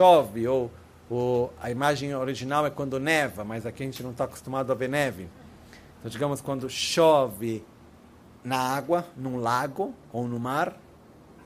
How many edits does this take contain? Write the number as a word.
zero